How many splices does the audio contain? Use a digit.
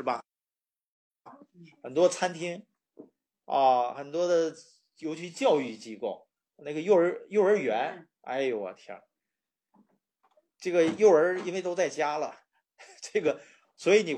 0